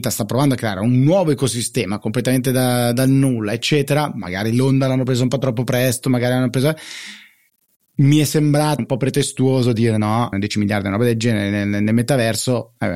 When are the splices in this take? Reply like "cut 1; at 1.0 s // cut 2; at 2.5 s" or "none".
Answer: cut 1; at 8.8 s // cut 2; at 10.3 s